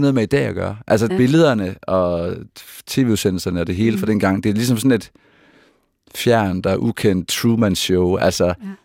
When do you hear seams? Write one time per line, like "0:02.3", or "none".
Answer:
0:01.1
0:07.3